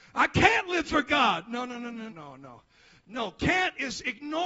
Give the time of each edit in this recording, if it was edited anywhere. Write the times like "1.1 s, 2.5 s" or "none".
2.1 s